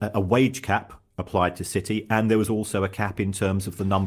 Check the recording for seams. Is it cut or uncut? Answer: uncut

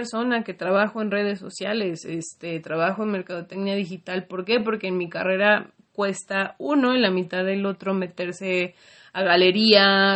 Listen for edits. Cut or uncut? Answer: uncut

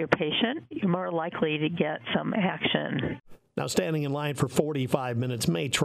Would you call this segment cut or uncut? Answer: uncut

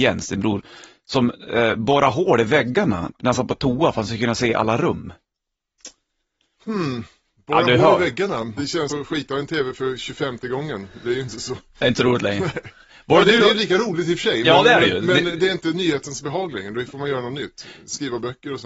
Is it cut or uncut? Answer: cut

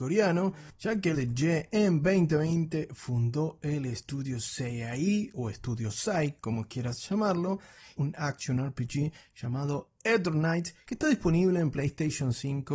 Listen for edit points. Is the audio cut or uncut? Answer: cut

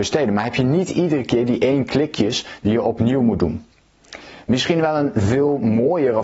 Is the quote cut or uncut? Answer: uncut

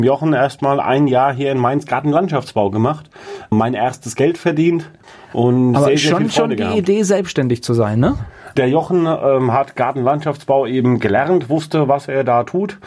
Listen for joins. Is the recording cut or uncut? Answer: uncut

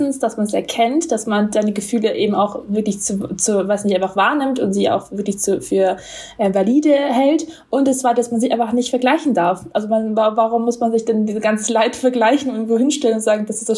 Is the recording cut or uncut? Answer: uncut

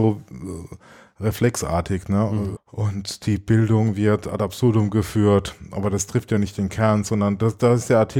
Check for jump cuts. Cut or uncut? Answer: cut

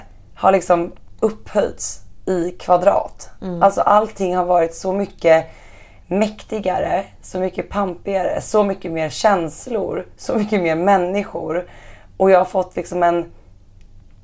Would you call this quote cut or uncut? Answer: uncut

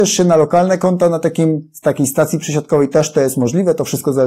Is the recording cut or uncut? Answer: uncut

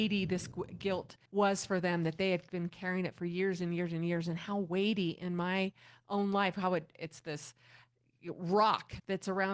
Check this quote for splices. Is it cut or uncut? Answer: cut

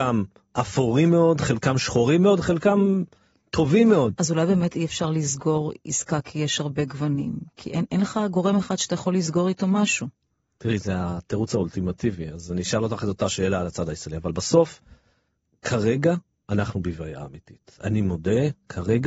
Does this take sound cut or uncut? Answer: uncut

